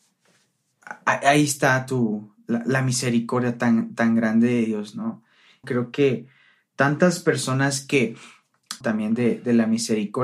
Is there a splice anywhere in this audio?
yes; 2 cuts; at 5.6 s, 8.8 s

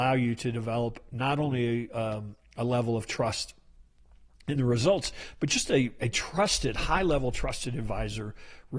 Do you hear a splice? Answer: no; 0 cuts

